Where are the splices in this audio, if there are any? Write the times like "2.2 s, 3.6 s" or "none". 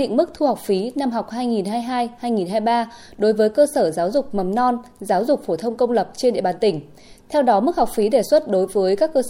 none